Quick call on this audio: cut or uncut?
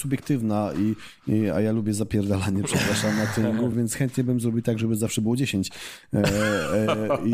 cut